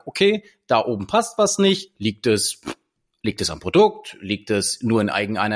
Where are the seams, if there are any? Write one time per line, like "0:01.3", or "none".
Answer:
none